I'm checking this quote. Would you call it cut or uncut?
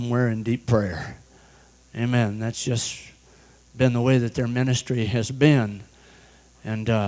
uncut